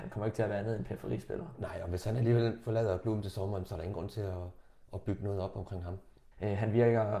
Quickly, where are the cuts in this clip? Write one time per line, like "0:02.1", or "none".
0:06.3